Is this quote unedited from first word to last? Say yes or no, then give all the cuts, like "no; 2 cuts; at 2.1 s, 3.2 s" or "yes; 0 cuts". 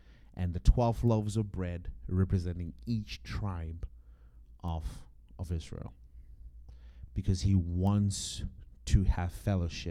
yes; 0 cuts